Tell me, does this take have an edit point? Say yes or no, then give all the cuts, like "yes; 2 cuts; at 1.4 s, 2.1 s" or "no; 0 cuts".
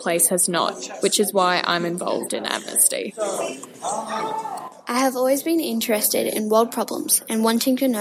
no; 0 cuts